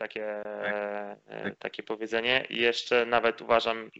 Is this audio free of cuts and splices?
yes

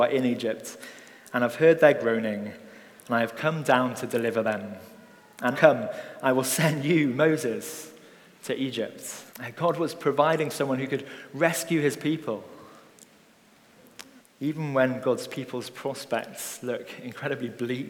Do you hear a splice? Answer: yes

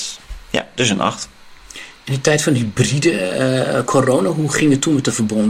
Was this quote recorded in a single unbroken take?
yes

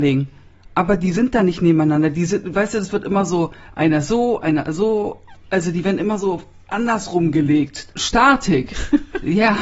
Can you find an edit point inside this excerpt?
yes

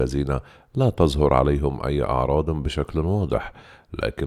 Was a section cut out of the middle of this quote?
no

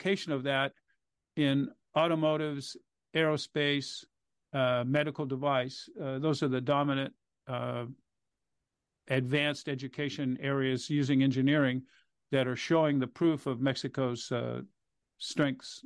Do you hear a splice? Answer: no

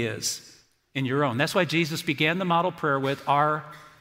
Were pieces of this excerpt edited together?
no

